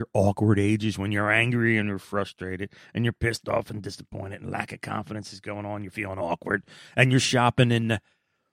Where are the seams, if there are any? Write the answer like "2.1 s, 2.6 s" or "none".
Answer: none